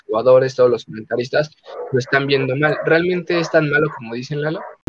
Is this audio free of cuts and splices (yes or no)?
yes